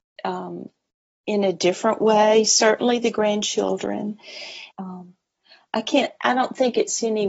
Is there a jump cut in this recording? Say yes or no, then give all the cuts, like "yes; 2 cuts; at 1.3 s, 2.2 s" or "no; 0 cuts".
yes; 1 cut; at 4.7 s